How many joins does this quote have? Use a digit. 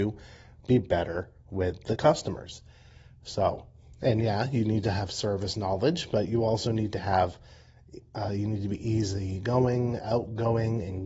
0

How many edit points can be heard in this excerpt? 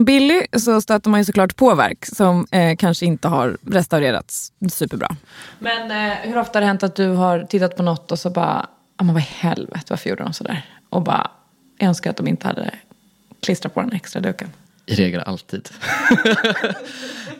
0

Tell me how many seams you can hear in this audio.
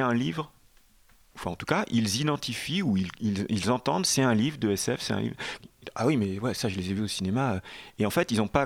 1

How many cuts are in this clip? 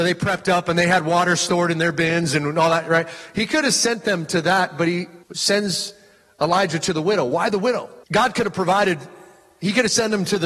2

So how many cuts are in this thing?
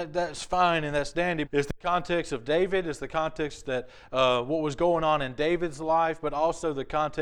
1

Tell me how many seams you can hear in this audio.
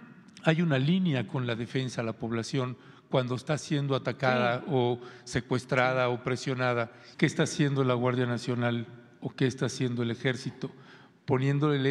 1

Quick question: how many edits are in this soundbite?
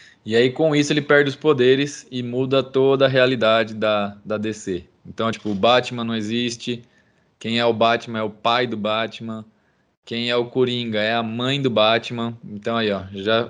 0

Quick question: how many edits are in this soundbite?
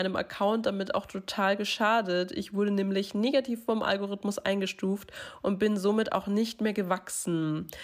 0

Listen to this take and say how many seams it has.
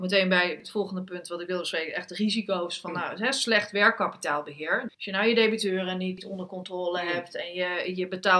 1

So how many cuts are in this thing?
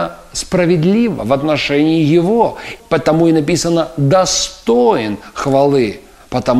1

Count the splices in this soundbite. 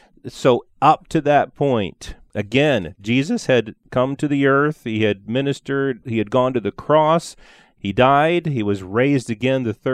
0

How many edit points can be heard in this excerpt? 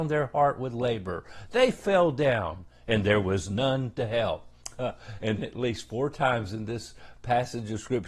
1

